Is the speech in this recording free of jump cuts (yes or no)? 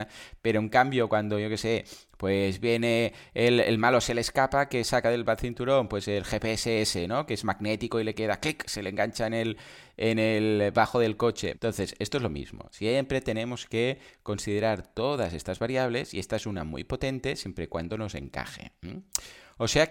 no